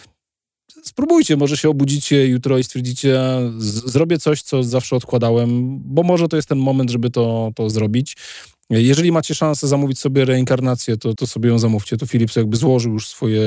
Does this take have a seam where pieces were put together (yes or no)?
yes